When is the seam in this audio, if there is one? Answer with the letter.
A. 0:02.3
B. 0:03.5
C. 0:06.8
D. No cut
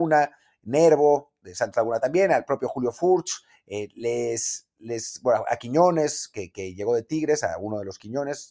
D